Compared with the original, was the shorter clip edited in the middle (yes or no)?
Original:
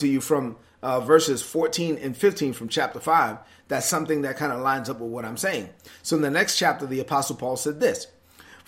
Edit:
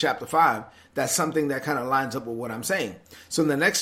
no